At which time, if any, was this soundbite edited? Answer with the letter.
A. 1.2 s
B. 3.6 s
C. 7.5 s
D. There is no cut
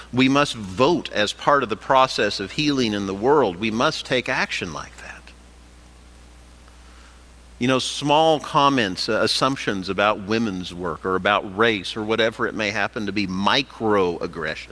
C